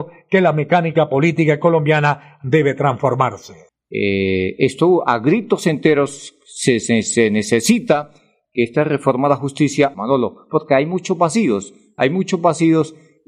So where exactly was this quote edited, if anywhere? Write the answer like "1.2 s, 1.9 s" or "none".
3.7 s, 9.9 s